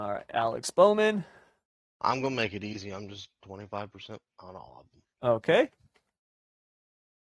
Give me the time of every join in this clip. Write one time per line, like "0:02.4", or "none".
none